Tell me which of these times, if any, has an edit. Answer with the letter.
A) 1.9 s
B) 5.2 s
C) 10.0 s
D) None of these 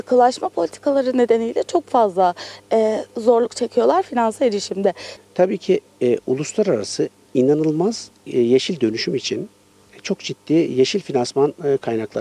B